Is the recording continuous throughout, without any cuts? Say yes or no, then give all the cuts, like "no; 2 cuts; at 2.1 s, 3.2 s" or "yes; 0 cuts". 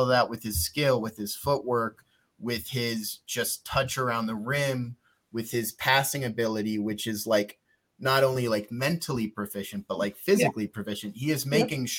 yes; 0 cuts